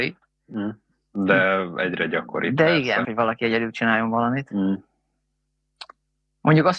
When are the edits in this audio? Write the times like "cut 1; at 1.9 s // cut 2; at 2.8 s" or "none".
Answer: cut 1; at 3.0 s

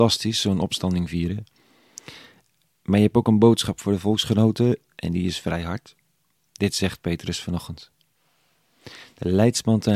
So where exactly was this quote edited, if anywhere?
none

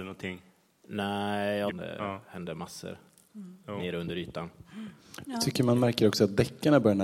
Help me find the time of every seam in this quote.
cut 1; at 1.7 s

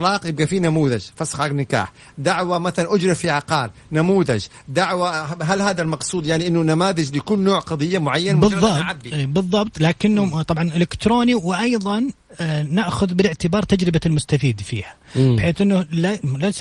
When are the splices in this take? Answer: none

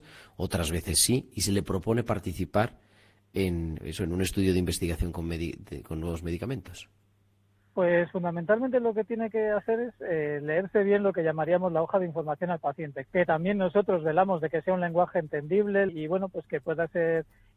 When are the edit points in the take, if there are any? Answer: cut 1; at 13.1 s // cut 2; at 15.9 s

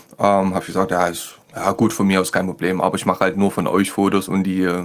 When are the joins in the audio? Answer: cut 1; at 1.4 s

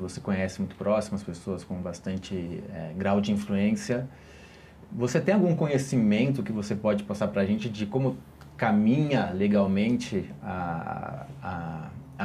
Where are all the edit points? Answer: none

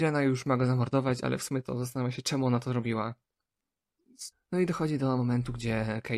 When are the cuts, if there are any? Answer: cut 1; at 4.3 s

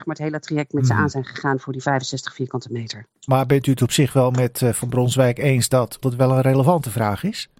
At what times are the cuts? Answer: cut 1; at 6.0 s

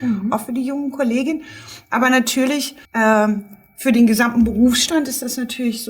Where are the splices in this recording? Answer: cut 1; at 2.8 s

